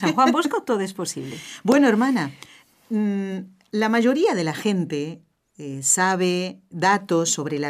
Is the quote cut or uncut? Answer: cut